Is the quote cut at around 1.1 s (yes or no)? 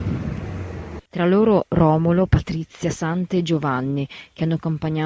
yes